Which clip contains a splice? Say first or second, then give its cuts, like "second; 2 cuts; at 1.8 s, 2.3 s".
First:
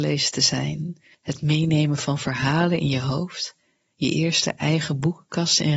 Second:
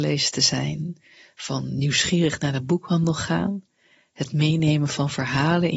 first; 1 cut; at 1.1 s